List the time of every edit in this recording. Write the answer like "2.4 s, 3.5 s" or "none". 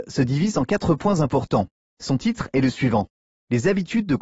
1.8 s